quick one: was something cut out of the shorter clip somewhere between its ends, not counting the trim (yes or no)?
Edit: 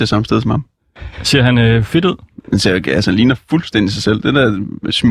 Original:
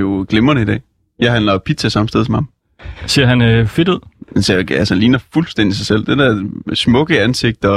no